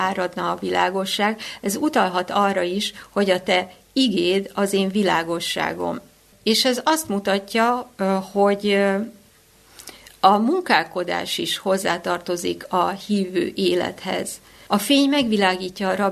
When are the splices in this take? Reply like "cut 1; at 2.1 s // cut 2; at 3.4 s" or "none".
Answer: cut 1; at 6.3 s // cut 2; at 14.7 s